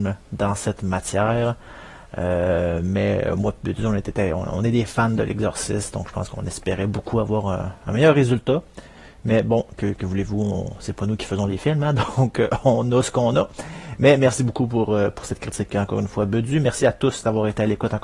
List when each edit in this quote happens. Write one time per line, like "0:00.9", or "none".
none